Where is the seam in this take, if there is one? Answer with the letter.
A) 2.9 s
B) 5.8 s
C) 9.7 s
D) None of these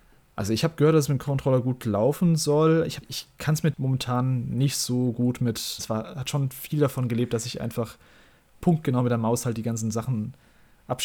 B